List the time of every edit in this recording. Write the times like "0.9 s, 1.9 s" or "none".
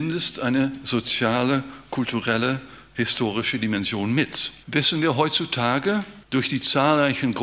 4.6 s